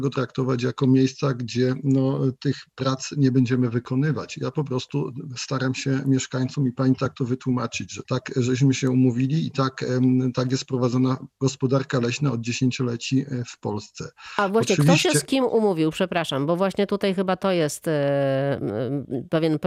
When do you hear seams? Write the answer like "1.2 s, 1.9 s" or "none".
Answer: 8.0 s